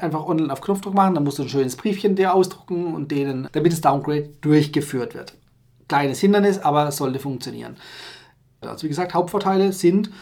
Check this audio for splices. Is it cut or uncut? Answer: cut